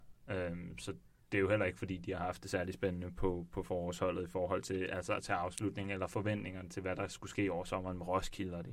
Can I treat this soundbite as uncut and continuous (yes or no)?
yes